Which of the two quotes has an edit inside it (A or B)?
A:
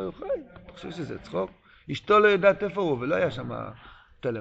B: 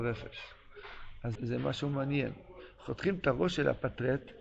B